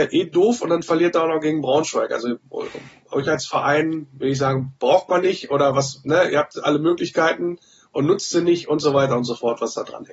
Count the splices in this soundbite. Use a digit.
0